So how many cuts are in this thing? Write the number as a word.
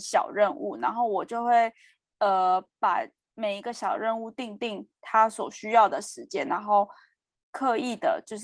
zero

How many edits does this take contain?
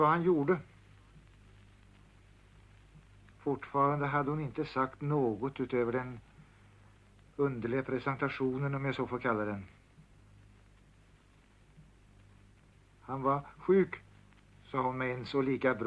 one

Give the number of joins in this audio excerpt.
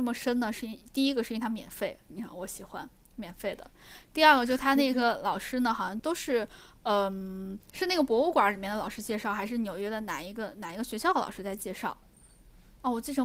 three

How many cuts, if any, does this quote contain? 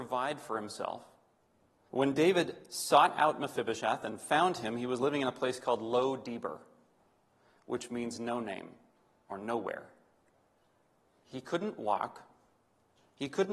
two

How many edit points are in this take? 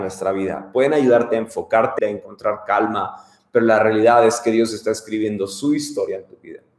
one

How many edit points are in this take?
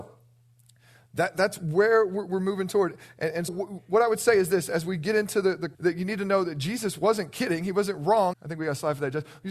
three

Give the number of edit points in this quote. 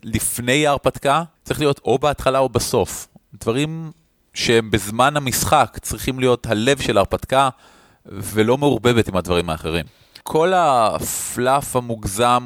two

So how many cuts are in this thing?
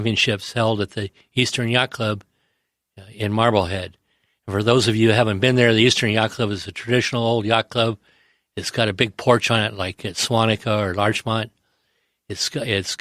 zero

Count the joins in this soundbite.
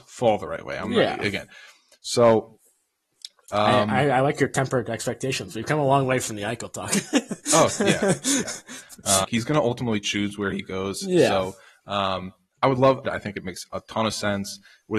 two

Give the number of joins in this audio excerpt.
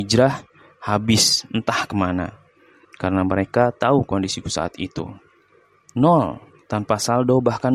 two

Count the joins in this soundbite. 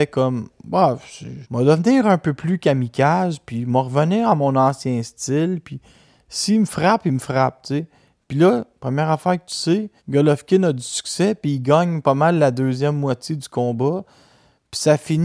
two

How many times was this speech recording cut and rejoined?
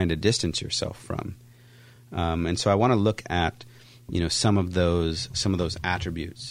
zero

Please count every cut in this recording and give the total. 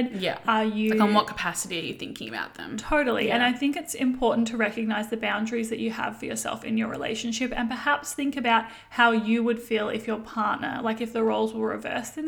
zero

